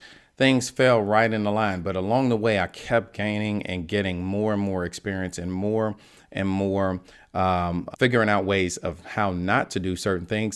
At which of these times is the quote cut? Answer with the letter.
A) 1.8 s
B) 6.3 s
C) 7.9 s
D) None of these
C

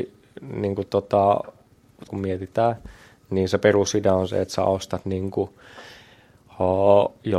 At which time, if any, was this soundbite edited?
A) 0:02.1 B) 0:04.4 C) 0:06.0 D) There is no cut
A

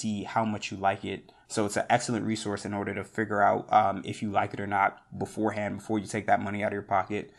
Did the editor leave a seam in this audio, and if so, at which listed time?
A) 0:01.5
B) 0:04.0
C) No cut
A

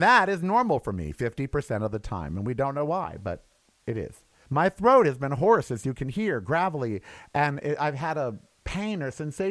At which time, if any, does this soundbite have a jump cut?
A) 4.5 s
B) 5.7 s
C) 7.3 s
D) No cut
A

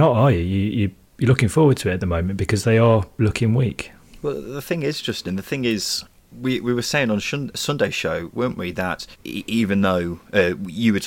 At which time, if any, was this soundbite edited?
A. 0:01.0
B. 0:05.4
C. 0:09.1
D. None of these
C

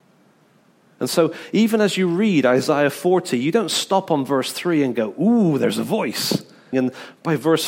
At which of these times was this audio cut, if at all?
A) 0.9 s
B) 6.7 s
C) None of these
B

